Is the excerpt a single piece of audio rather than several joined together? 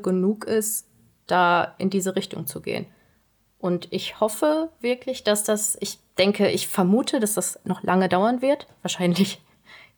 yes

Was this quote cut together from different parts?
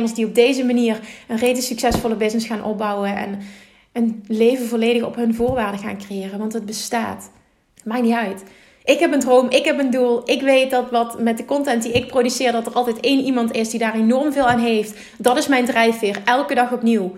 yes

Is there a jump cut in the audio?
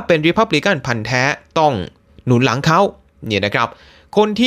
no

